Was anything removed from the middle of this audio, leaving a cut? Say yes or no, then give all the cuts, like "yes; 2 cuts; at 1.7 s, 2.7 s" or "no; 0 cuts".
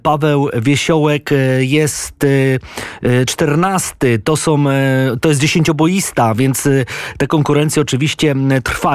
no; 0 cuts